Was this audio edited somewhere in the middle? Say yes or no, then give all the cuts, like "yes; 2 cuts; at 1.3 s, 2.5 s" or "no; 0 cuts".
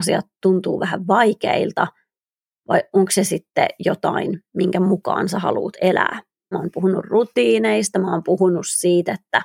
yes; 1 cut; at 6.5 s